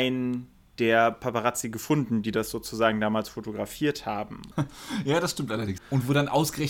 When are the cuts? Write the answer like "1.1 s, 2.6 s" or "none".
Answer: 4.5 s, 5.8 s